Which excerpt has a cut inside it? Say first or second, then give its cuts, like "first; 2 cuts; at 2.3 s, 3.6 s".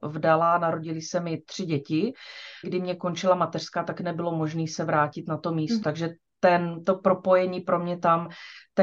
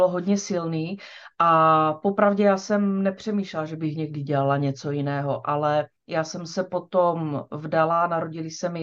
first; 2 cuts; at 2.6 s, 5.8 s